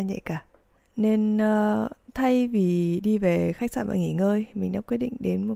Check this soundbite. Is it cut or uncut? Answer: uncut